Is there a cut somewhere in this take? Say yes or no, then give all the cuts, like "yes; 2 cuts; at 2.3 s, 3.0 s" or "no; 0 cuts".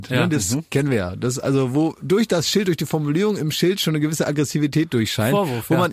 no; 0 cuts